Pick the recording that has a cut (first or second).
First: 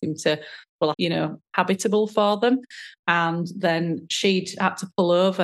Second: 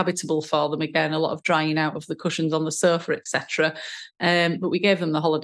first